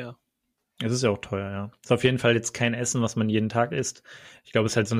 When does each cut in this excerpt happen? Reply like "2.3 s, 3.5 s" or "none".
none